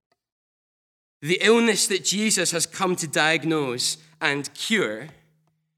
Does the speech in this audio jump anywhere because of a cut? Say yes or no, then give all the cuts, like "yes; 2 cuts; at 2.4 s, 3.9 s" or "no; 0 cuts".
yes; 1 cut; at 1.0 s